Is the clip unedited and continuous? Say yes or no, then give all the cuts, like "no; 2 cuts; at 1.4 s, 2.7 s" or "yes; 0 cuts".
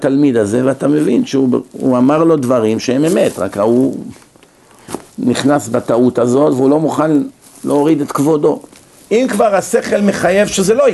no; 2 cuts; at 5.1 s, 9.0 s